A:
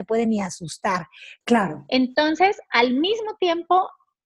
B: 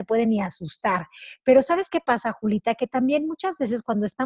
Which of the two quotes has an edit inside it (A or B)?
A